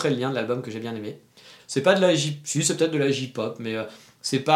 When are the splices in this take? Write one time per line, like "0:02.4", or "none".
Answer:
0:01.6